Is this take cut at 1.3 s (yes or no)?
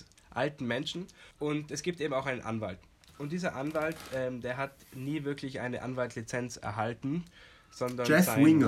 yes